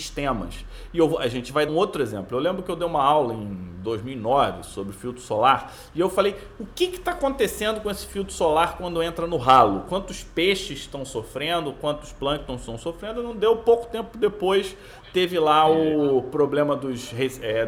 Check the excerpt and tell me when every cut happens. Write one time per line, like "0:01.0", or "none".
0:01.7